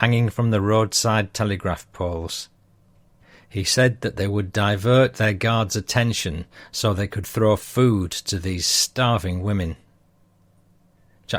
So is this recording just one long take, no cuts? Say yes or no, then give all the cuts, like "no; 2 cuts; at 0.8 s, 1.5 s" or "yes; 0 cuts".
yes; 0 cuts